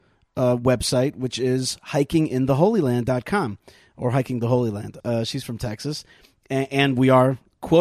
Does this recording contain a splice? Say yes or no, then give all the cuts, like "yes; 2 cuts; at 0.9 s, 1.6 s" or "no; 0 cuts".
yes; 1 cut; at 5.0 s